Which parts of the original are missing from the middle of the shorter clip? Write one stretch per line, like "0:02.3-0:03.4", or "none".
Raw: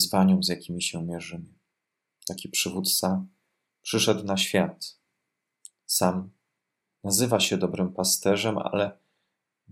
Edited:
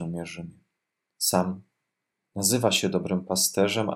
0:02.0-0:05.8